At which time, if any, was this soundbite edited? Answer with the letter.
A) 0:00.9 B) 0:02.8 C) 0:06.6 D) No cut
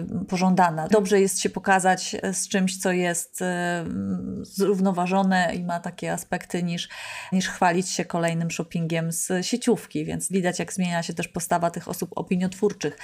A